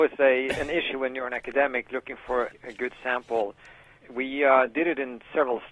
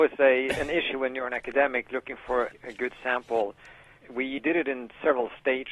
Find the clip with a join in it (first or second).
second